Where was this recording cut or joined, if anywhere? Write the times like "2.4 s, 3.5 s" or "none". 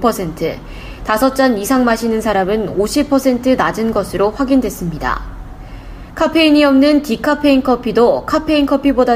none